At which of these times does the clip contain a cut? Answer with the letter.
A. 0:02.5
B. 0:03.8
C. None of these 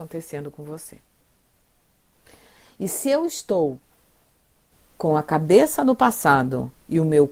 C